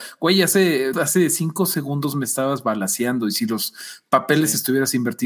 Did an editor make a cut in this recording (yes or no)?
yes